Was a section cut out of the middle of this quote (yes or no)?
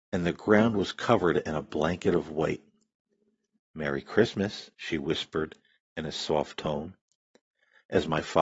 yes